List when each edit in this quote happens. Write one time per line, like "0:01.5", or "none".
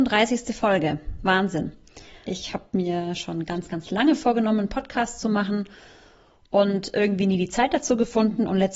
0:02.3